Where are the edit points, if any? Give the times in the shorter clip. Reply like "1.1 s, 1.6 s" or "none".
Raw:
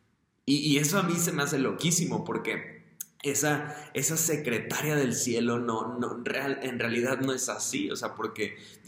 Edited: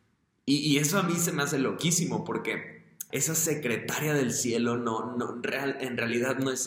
3.1 s